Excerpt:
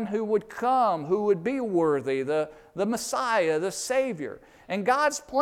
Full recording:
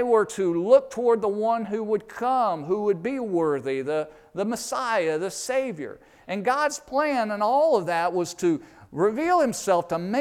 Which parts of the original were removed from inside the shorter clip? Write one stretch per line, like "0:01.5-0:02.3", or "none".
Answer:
none